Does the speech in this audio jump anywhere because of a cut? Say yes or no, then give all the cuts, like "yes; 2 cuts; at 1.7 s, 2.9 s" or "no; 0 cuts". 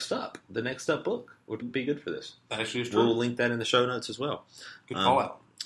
yes; 1 cut; at 1.6 s